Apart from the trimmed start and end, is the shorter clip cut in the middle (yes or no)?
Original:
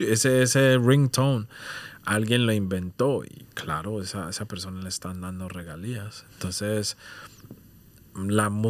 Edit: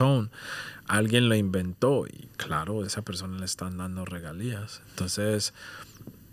yes